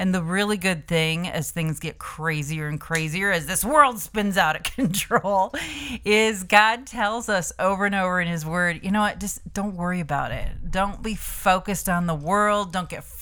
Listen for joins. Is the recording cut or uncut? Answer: uncut